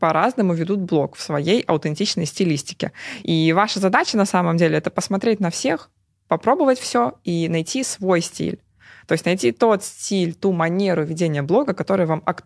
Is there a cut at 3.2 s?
no; 0 cuts

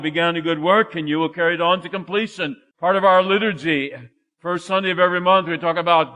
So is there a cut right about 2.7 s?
yes; 1 cut; at 2.7 s

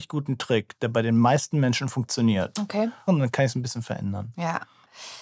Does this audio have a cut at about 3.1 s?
yes; 1 cut; at 3.1 s

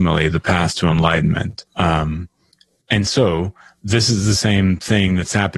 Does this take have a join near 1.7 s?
yes; 1 cut; at 1.7 s

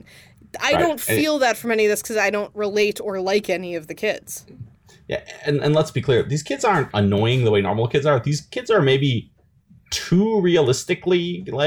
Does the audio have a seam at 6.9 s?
yes; 1 cut; at 6.9 s

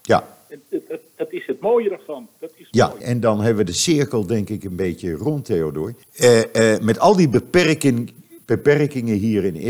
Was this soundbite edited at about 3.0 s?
yes; 2 cuts; at 3.0 s, 6.0 s

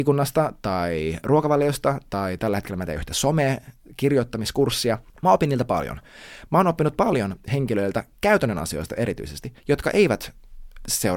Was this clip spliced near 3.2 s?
no; 3 cuts; at 5.1 s, 6.5 s, 9.6 s

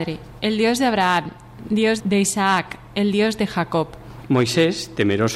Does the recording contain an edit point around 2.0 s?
yes; 1 cut; at 2.0 s

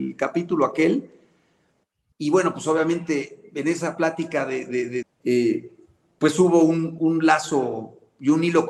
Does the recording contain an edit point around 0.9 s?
no; 3 cuts; at 2.1 s, 5.0 s, 7.0 s

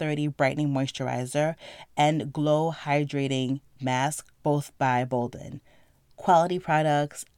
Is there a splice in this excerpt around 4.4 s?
yes; 1 cut; at 4.4 s

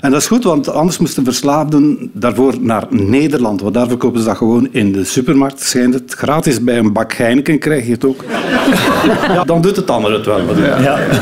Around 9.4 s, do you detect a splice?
yes; 1 cut; at 9.4 s

